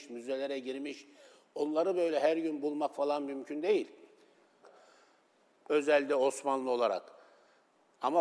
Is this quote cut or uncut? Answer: cut